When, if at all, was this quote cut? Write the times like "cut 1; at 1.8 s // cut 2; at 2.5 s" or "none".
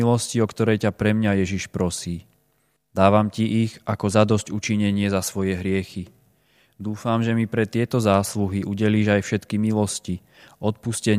cut 1; at 2.8 s